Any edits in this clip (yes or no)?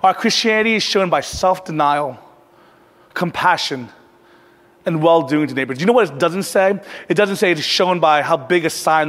no